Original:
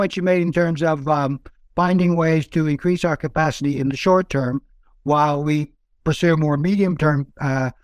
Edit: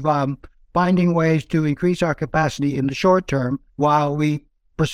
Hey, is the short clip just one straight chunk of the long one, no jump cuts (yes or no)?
no